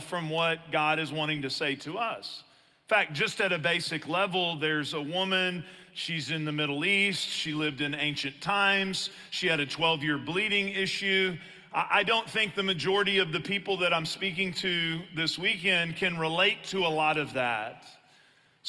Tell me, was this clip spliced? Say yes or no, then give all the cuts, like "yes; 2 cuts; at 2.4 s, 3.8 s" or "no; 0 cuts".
no; 0 cuts